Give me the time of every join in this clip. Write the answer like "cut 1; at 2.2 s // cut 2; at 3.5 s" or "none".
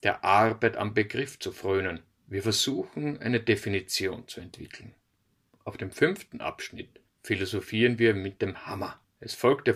none